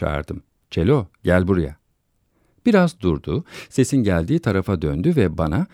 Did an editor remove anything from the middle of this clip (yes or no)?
no